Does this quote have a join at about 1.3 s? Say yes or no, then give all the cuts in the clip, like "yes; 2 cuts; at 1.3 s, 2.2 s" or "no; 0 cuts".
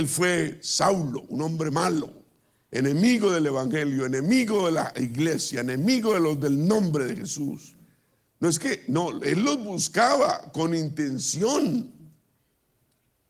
no; 1 cut; at 8.3 s